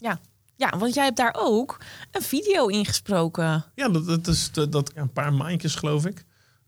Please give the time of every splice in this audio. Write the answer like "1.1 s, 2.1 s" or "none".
3.7 s, 4.9 s